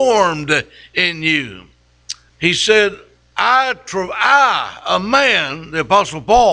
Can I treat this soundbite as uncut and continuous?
no; 1 cut; at 2.3 s

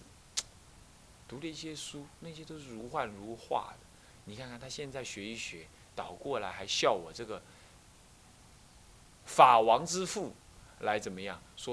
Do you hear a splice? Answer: yes; 1 cut; at 4.1 s

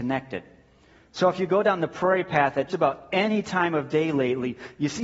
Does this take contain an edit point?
yes; 1 cut; at 2.7 s

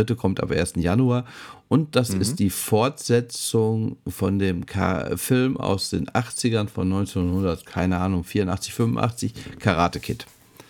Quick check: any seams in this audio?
no; 0 cuts

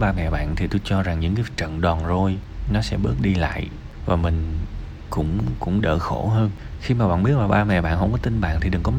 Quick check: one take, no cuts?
no; 1 cut; at 5.8 s

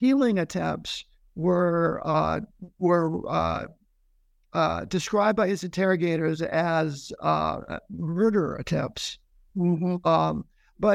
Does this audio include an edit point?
no; 0 cuts

